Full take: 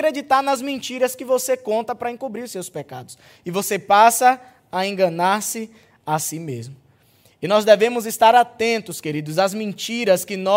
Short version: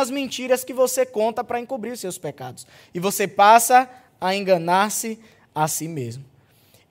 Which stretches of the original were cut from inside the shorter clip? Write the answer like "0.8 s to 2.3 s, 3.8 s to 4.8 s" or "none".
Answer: none

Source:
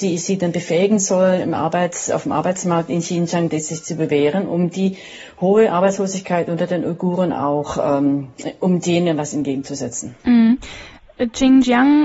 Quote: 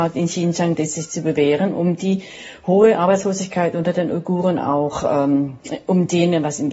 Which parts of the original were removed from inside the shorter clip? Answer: none

